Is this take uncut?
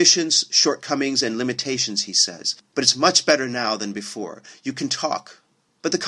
yes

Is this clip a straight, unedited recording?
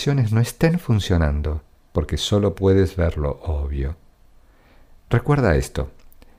yes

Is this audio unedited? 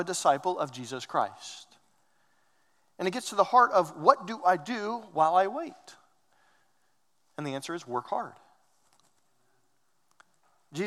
yes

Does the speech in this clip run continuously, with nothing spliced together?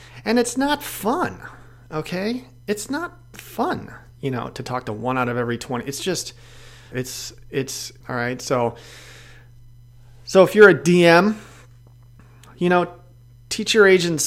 no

